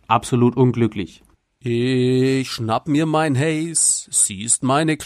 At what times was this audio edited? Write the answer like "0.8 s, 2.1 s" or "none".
none